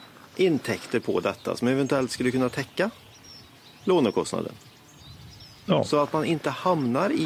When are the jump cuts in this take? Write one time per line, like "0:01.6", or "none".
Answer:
none

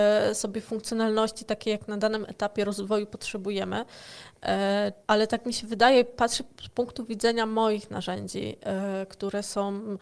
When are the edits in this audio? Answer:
0:05.0

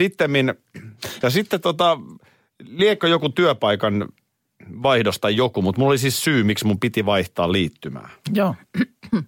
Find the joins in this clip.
0:01.2

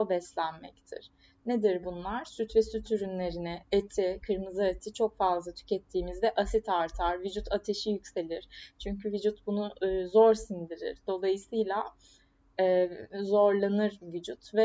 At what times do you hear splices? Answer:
none

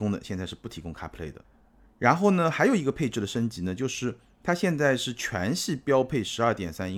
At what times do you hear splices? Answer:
none

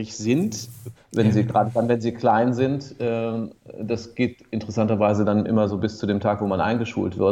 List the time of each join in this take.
0:01.0

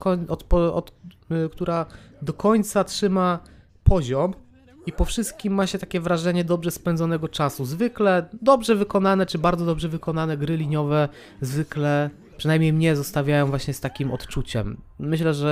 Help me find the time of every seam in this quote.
none

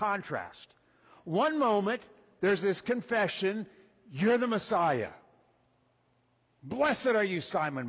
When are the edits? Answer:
none

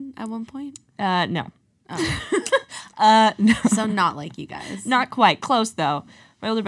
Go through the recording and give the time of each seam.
none

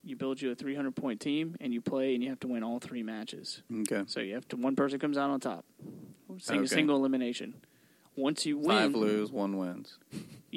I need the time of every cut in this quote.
0:03.7

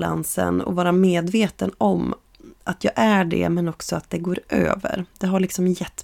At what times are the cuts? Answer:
none

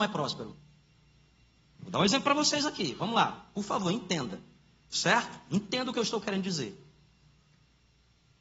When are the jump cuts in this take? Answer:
0:01.7

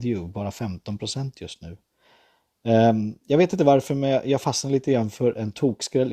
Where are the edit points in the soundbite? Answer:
none

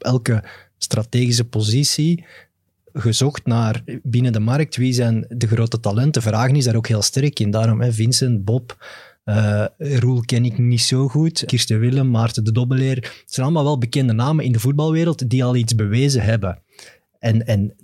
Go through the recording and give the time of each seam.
0:11.5

